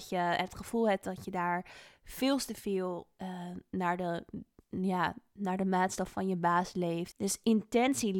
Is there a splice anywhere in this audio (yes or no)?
yes